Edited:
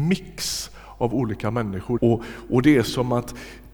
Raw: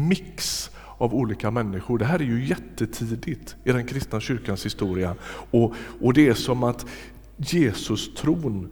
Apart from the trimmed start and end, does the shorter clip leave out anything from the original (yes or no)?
yes